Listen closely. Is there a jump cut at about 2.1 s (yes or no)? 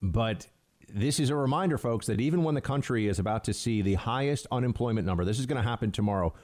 no